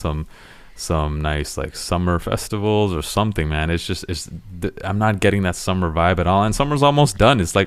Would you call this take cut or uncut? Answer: uncut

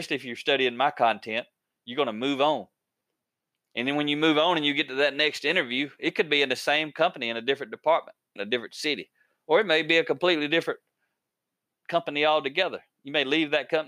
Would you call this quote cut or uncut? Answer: cut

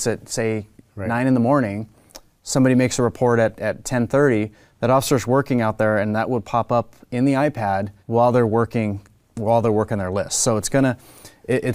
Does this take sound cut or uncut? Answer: cut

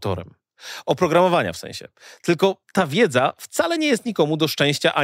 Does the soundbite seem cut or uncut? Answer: cut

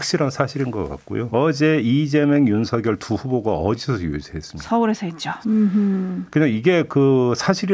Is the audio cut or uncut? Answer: cut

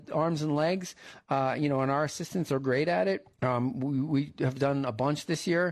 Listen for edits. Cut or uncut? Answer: cut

